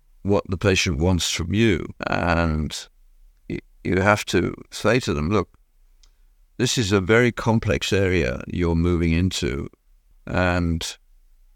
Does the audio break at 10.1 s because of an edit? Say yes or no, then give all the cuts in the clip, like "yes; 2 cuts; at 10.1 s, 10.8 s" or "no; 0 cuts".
yes; 2 cuts; at 2.0 s, 10.1 s